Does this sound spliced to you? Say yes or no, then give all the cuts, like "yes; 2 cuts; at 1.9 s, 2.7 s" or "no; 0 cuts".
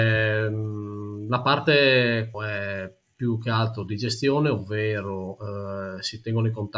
yes; 1 cut; at 2.3 s